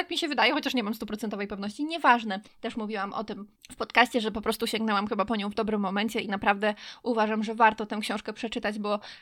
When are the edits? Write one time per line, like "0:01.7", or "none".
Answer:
0:02.5